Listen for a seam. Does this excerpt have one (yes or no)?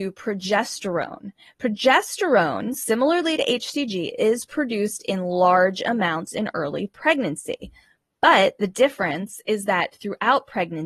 no